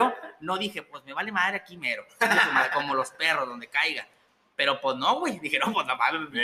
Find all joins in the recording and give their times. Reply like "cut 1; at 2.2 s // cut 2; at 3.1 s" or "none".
none